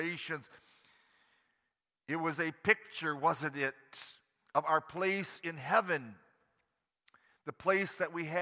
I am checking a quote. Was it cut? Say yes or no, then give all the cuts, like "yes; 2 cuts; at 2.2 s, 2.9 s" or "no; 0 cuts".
no; 0 cuts